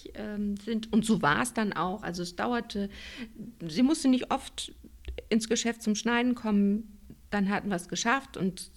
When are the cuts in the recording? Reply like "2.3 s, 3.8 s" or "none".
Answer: none